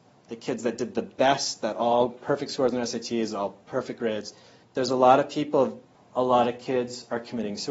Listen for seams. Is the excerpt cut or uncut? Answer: cut